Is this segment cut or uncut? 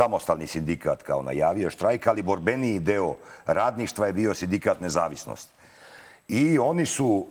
uncut